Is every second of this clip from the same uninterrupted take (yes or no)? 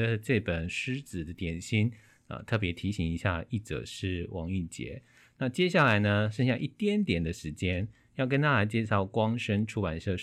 yes